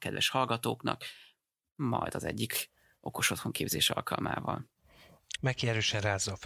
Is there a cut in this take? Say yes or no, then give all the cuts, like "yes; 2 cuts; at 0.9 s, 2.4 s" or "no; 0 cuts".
yes; 1 cut; at 5.4 s